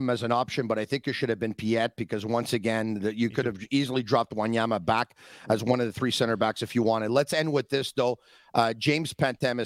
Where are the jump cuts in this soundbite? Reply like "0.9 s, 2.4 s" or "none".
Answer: none